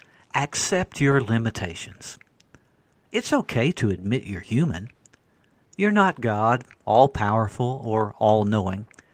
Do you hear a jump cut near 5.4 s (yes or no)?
no